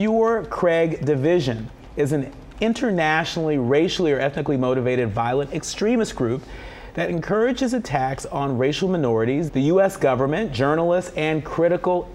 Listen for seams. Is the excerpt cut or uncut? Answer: cut